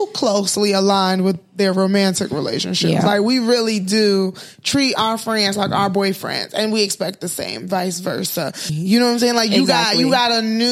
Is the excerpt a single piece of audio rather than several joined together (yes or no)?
no